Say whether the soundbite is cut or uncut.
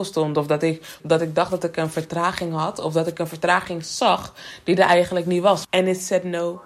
cut